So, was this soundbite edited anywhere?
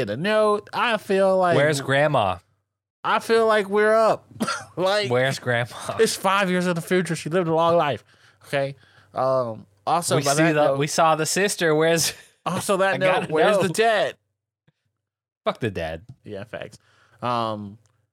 no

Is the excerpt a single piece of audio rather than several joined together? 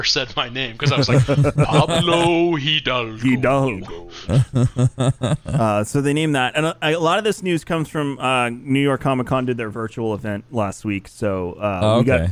yes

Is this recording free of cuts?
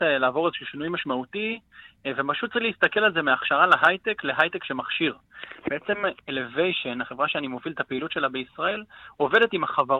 yes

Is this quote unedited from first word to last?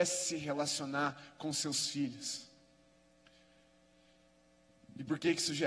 yes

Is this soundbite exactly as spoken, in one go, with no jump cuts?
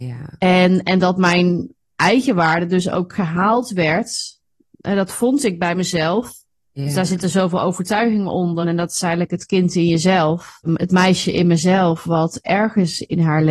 no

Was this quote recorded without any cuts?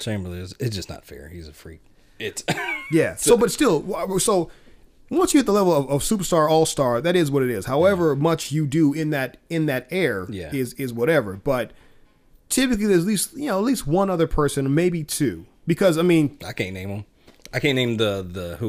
yes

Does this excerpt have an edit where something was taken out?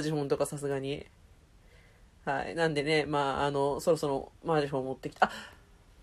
no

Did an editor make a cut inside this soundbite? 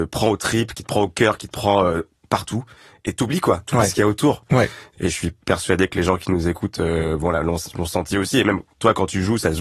yes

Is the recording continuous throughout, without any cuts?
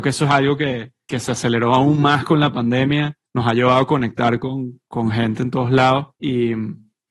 no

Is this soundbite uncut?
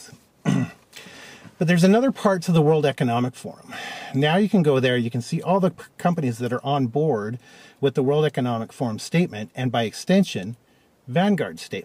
yes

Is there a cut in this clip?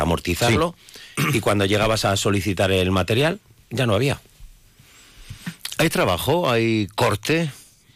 no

